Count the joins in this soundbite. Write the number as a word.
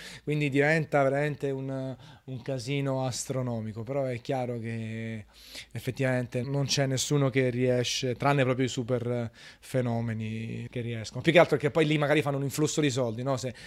two